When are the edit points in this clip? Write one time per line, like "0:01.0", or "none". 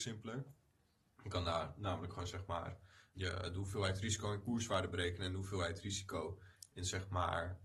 0:03.1